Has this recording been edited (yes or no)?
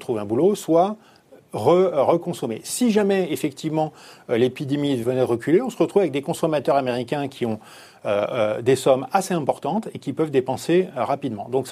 yes